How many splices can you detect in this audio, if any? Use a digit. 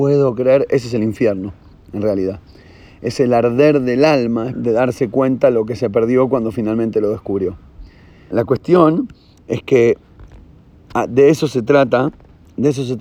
2